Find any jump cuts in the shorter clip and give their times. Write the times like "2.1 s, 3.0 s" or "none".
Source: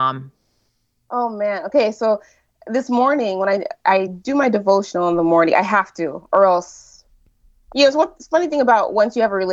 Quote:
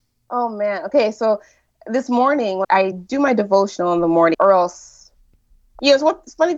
2.6 s, 4.3 s